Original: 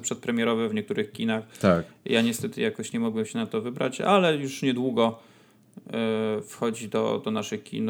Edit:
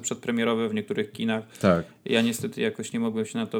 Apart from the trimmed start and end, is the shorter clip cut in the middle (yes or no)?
no